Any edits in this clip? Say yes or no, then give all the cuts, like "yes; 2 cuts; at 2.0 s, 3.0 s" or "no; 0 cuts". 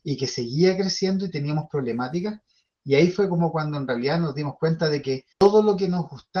yes; 1 cut; at 5.3 s